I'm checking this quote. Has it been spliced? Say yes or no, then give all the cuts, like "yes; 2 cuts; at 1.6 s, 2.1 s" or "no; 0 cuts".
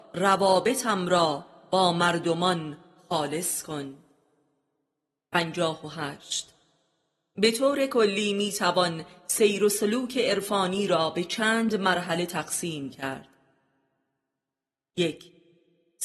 no; 0 cuts